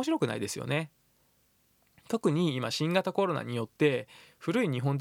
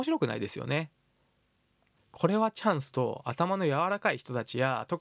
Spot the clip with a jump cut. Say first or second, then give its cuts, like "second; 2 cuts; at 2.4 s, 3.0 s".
second; 1 cut; at 2.0 s